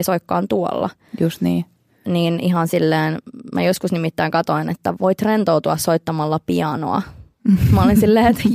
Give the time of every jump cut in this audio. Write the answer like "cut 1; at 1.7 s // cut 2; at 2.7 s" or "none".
none